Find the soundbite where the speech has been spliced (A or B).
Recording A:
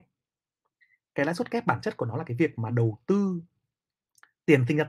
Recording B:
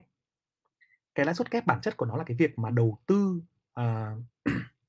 A